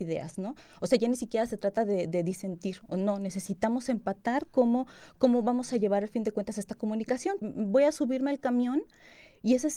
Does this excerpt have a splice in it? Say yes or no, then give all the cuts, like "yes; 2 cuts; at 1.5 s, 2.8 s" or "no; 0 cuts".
yes; 1 cut; at 7.4 s